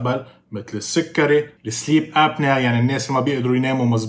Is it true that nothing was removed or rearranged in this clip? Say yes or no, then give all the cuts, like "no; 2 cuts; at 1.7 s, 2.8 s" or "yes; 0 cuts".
no; 1 cut; at 1.6 s